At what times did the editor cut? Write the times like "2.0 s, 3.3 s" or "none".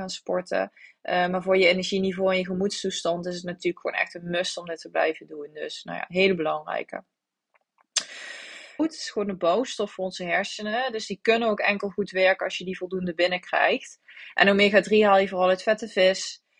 8.8 s